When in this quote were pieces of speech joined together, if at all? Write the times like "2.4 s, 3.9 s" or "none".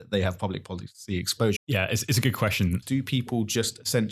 1.6 s, 2.8 s